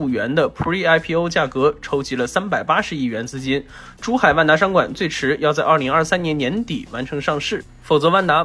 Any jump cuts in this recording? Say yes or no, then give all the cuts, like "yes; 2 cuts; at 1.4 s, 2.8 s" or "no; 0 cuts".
no; 0 cuts